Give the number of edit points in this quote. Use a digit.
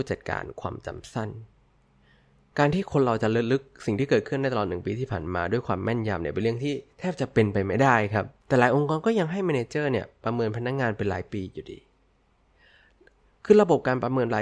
1